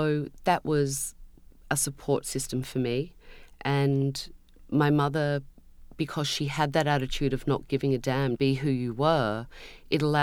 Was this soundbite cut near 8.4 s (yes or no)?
yes